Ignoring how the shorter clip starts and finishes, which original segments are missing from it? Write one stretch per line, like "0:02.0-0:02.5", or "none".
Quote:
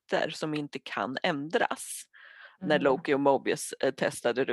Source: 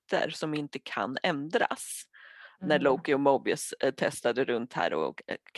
none